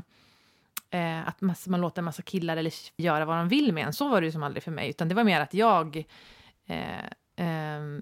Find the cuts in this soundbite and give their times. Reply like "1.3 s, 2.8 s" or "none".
3.0 s